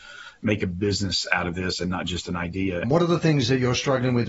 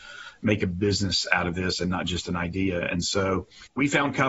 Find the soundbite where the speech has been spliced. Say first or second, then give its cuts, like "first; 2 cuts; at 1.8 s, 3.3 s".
first; 1 cut; at 2.8 s